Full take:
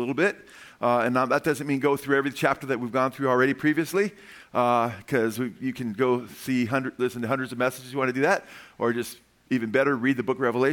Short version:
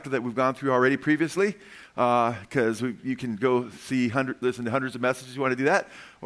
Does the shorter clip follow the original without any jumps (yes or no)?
yes